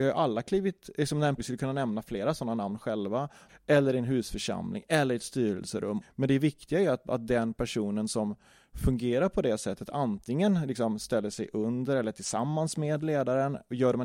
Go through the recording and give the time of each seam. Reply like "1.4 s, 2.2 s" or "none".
1.4 s, 3.5 s, 6.0 s